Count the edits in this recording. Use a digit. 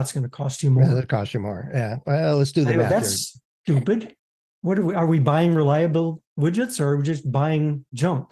0